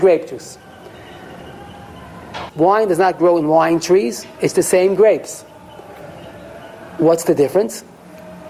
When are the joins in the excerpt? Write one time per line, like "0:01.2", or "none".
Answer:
0:02.5